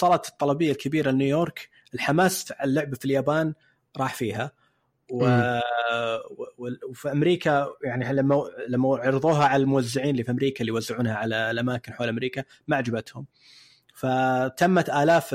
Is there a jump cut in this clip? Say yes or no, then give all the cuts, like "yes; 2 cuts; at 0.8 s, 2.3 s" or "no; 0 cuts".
no; 0 cuts